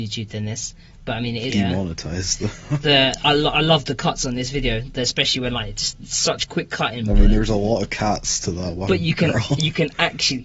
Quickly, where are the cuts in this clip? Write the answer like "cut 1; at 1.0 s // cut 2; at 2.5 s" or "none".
cut 1; at 1.5 s